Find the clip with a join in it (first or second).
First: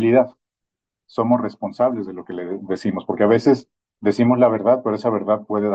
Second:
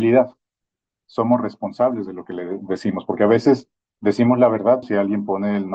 second